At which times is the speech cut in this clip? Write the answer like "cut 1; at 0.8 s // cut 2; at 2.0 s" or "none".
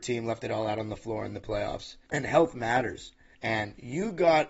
cut 1; at 2.1 s // cut 2; at 3.3 s